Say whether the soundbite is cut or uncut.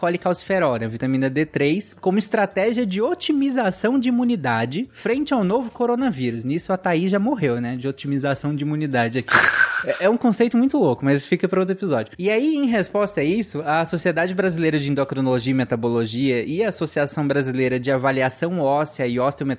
uncut